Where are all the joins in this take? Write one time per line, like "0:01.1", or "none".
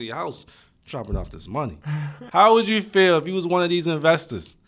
0:02.3